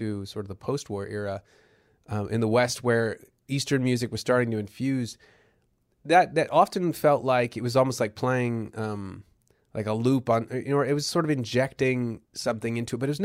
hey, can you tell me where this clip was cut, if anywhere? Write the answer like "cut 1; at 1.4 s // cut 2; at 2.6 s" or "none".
cut 1; at 12.3 s